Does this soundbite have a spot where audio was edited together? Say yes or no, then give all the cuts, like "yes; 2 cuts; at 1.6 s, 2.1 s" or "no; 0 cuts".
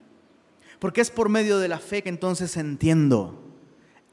no; 0 cuts